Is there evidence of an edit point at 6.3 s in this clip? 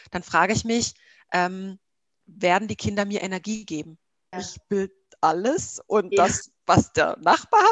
no; 2 cuts; at 2.2 s, 4.3 s

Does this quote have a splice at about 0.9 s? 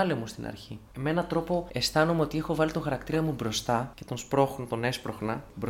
yes; 1 cut; at 0.9 s

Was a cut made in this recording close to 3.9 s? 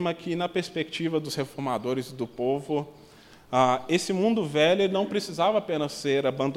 no; 0 cuts

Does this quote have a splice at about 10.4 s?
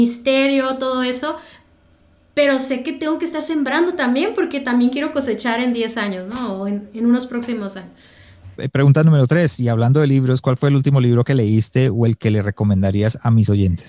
yes; 2 cuts; at 8.5 s, 10.4 s

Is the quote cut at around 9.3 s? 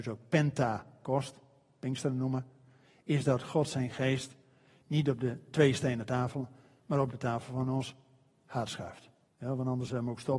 yes; 1 cut; at 9.3 s

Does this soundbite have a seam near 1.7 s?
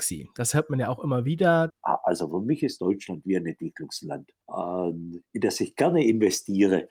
yes; 2 cuts; at 1.7 s, 4.4 s

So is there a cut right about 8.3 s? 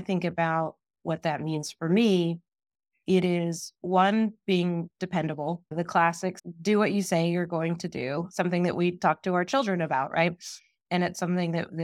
no; 1 cut; at 10.8 s

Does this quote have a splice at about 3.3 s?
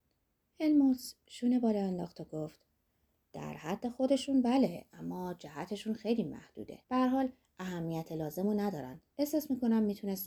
no; 2 cuts; at 6.8 s, 9.1 s

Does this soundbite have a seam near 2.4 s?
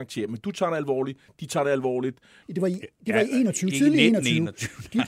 yes; 1 cut; at 2.4 s

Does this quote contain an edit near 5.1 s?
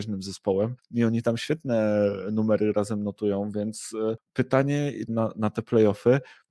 yes; 1 cut; at 5.1 s

